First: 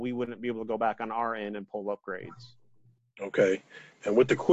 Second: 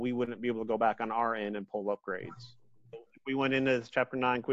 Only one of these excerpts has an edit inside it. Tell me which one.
second; 1 cut; at 2.9 s

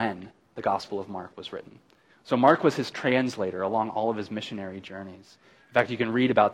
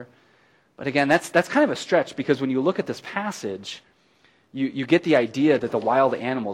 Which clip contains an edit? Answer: first; 1 cut; at 2.1 s

